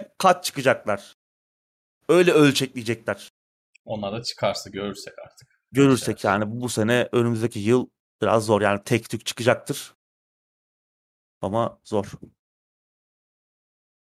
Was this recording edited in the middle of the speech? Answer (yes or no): yes